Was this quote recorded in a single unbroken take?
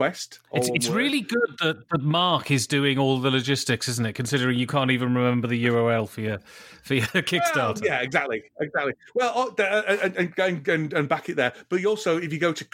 yes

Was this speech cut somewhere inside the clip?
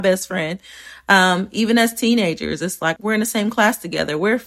yes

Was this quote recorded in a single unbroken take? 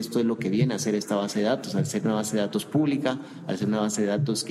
yes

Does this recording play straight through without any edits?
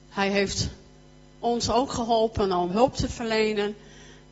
no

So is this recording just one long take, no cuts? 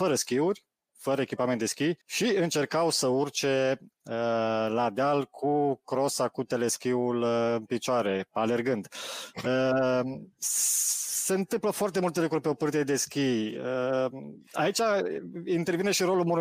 no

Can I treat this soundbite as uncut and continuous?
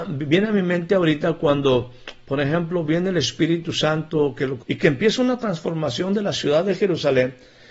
no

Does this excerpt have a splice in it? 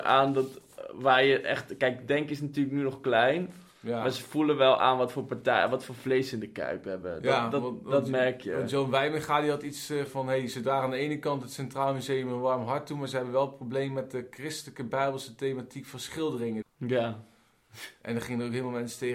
yes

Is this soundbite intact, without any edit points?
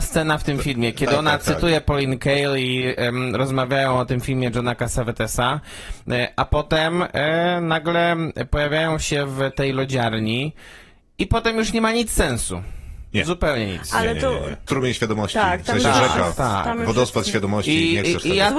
no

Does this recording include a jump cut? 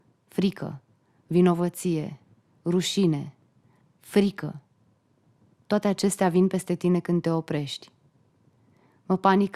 yes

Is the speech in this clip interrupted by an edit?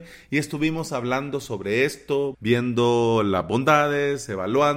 yes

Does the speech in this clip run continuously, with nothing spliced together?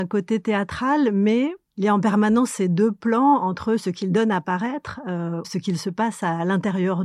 no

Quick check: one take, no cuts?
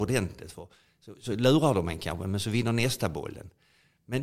yes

